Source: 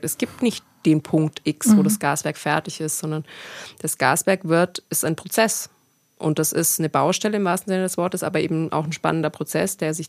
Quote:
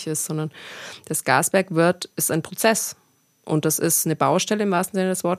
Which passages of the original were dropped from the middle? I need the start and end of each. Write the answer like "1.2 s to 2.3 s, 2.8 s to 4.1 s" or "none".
none